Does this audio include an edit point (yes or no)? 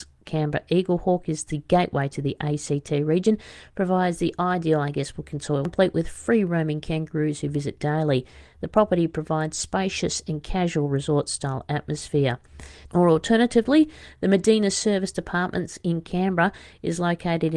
yes